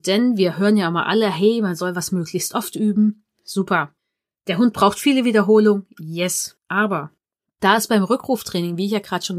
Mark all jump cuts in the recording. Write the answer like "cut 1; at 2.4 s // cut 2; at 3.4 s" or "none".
none